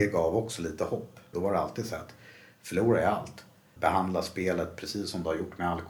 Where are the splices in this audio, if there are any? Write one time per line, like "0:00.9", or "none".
0:01.3
0:03.8